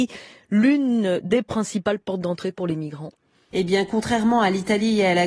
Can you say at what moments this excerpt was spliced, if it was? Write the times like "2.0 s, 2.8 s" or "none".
none